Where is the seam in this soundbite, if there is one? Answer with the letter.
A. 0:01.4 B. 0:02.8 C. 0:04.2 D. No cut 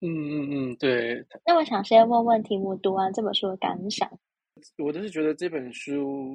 D